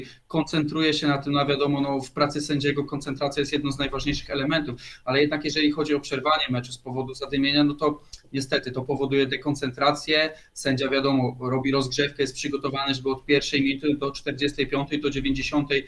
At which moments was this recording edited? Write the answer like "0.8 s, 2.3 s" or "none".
none